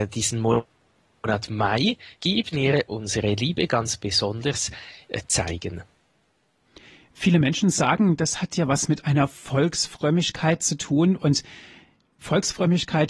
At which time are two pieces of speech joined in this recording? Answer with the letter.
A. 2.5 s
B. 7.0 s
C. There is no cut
A